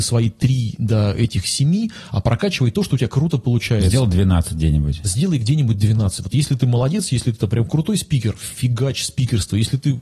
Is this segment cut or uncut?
uncut